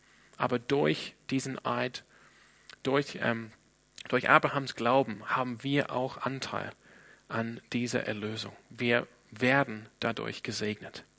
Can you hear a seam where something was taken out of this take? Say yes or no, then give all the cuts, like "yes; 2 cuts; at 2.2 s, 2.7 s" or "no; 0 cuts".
no; 0 cuts